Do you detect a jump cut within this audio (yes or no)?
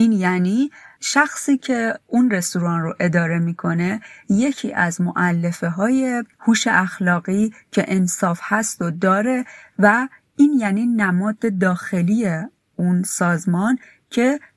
no